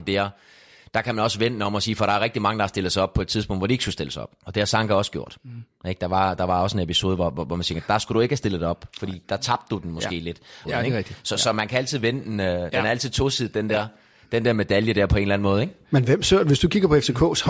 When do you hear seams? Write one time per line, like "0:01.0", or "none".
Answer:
0:10.6